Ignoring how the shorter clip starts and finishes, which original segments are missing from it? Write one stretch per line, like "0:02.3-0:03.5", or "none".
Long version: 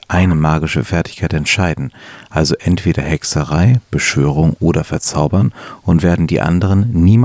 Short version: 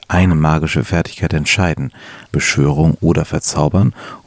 0:02.2-0:03.8